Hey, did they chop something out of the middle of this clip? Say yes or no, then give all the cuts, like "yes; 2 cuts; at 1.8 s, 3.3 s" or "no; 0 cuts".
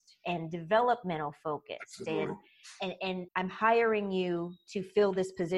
yes; 1 cut; at 3.3 s